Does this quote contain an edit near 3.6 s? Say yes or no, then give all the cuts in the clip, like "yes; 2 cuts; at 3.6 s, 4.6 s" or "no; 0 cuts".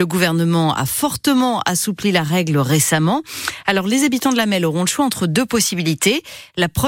no; 0 cuts